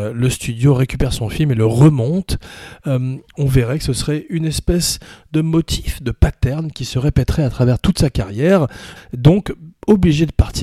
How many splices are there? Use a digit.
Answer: 1